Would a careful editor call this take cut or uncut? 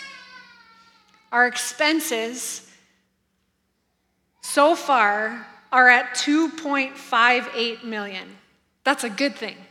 uncut